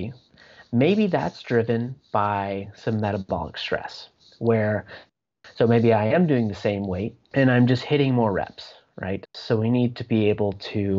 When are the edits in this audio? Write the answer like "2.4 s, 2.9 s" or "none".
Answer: 7.3 s, 9.3 s